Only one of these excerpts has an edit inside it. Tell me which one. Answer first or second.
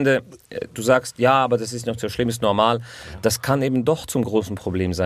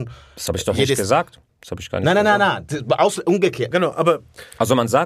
second